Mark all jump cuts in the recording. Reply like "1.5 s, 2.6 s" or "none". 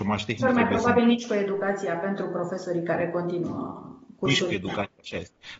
none